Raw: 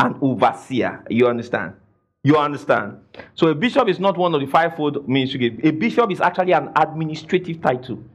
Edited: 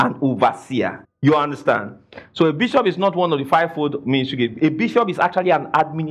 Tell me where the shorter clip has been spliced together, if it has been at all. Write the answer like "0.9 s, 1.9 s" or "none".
1.0 s